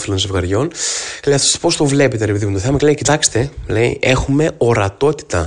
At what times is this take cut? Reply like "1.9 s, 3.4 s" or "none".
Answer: none